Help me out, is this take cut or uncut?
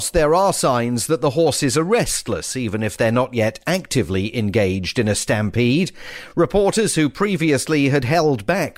uncut